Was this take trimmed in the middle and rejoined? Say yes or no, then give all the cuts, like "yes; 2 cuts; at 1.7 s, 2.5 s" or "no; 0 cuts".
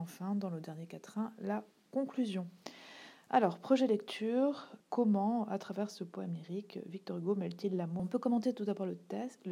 yes; 2 cuts; at 4.8 s, 8.0 s